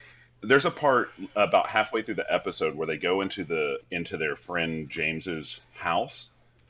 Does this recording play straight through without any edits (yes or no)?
no